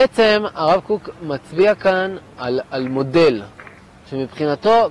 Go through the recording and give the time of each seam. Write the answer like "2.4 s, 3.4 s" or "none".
none

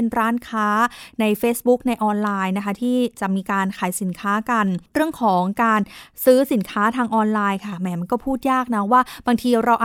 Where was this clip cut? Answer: 4.9 s

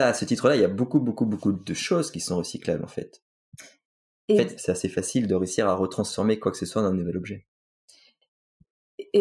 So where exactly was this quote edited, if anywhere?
4.6 s

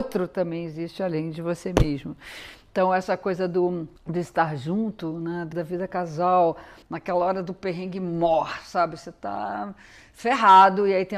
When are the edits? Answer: 4.0 s, 5.5 s, 6.8 s

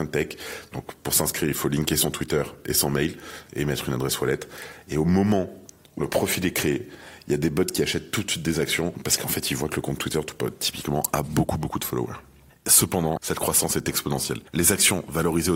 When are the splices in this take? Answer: 6.0 s, 12.5 s

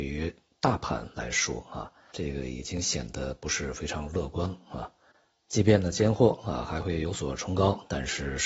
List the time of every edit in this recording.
2.1 s

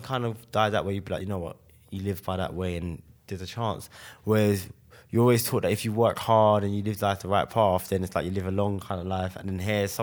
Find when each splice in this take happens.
none

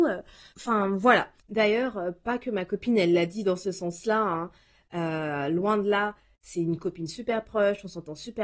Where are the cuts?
none

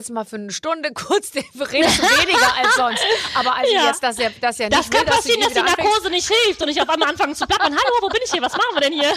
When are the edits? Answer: none

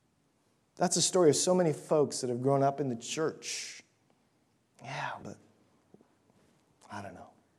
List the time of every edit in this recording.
5.2 s

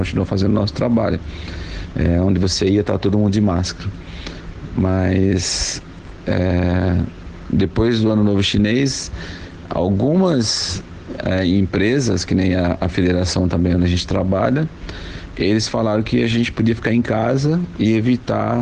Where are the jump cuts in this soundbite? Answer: 1.9 s

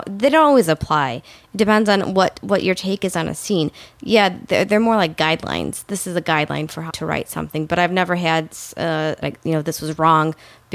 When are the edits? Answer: 6.9 s, 9.2 s

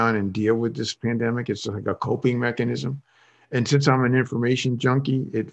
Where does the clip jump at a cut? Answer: none

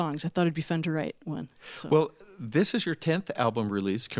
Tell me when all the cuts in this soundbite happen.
none

